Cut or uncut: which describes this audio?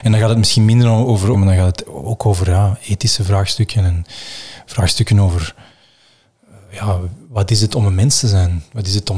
cut